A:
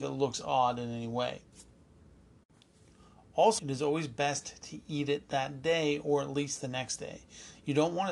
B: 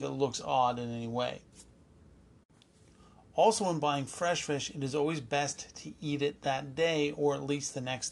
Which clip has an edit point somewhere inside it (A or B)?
A